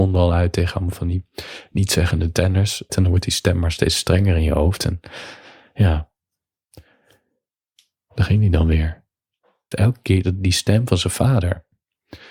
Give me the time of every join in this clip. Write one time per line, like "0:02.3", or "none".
0:02.9
0:09.7